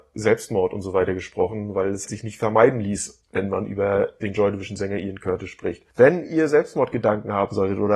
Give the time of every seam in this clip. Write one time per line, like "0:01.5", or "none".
0:02.1

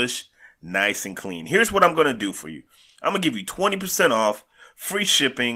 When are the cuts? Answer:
none

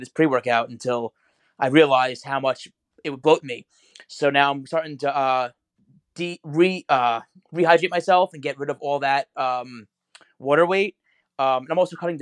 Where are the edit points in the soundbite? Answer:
none

